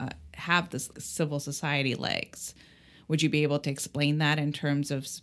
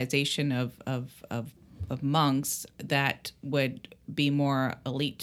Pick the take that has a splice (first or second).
first